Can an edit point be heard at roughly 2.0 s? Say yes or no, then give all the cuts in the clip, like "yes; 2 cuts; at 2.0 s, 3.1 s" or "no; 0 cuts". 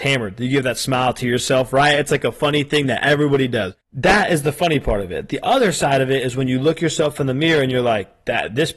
no; 1 cut; at 3.8 s